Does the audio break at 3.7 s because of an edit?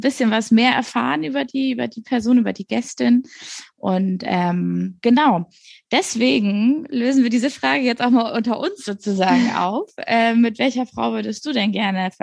yes; 1 cut; at 3.7 s

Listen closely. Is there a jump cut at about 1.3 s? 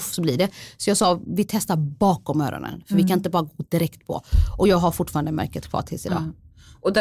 no; 0 cuts

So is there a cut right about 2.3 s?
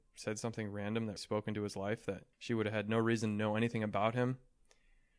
yes; 2 cuts; at 1.2 s, 2.3 s

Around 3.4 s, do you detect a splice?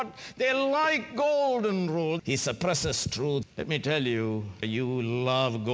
yes; 3 cuts; at 2.2 s, 3.4 s, 4.6 s

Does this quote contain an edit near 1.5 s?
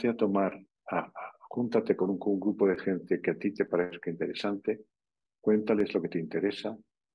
no; 0 cuts

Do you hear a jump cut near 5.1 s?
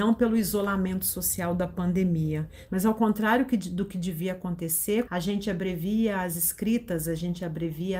yes; 2 cuts; at 2.7 s, 5.1 s

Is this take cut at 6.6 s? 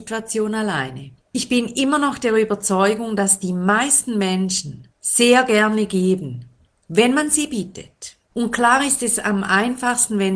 no; 3 cuts; at 1.2 s, 4.9 s, 8.3 s

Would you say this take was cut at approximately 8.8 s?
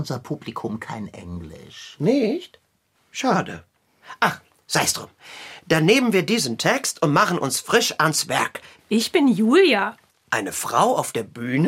yes; 1 cut; at 8.8 s

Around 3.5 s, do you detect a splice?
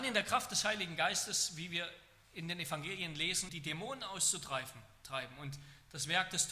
yes; 1 cut; at 3.5 s

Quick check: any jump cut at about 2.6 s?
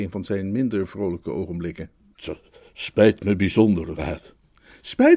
no; 1 cut; at 4.0 s

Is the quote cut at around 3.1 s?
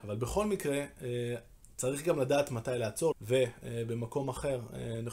yes; 1 cut; at 3.1 s

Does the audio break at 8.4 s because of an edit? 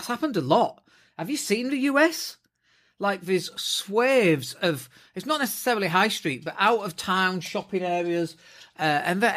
no; 0 cuts

